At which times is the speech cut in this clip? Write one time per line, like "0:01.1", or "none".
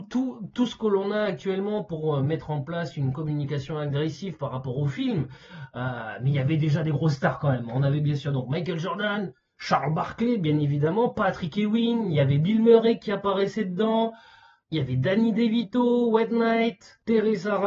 none